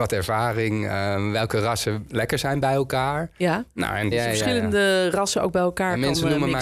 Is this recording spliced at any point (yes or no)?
yes